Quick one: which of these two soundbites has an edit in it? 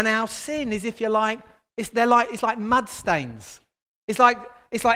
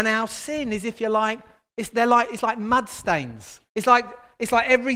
second; 1 cut; at 3.7 s

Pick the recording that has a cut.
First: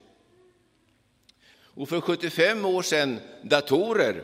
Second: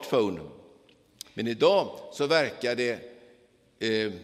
first; 1 cut; at 1.5 s

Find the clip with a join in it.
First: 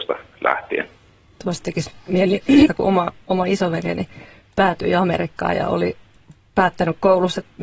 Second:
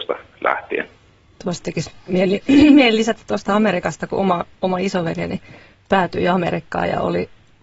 first; 1 cut; at 2.7 s

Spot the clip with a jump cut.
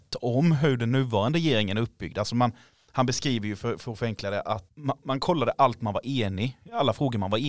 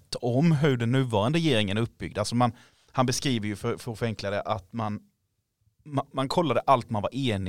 first; 1 cut; at 4.7 s

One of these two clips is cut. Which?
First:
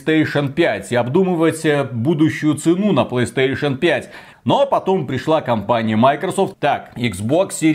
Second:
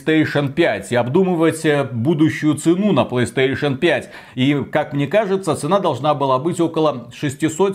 first; 2 cuts; at 4.3 s, 6.5 s

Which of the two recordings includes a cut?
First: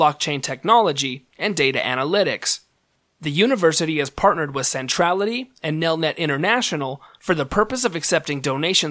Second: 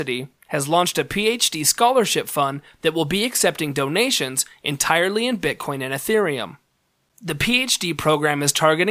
first; 1 cut; at 1.3 s

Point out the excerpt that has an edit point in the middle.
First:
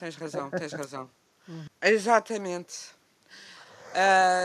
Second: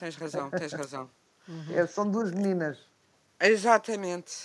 first; 1 cut; at 1.7 s

